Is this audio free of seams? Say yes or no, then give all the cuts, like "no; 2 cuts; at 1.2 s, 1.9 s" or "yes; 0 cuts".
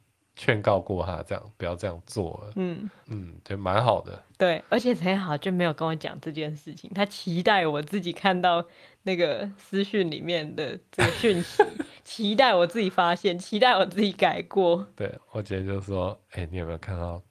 yes; 0 cuts